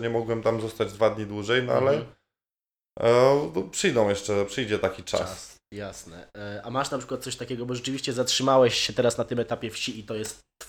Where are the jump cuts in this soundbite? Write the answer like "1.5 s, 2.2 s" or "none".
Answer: none